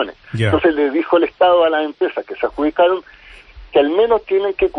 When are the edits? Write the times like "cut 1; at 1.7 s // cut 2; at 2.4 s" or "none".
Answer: none